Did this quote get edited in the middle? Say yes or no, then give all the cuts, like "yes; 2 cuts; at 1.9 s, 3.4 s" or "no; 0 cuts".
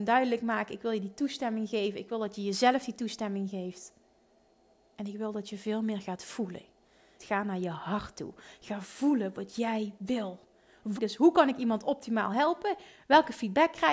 yes; 2 cuts; at 7.2 s, 11.0 s